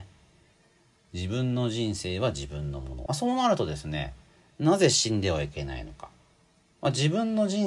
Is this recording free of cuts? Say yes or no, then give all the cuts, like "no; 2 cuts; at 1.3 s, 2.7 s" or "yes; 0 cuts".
no; 1 cut; at 3.1 s